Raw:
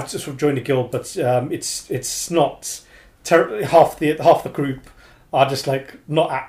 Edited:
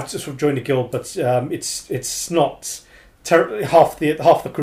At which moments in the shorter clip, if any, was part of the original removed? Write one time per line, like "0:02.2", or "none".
none